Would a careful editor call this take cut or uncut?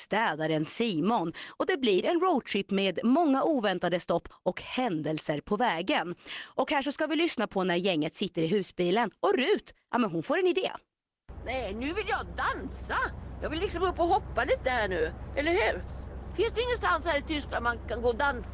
uncut